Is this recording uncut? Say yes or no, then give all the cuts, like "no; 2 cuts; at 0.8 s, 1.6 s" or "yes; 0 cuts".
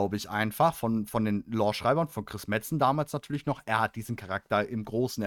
yes; 0 cuts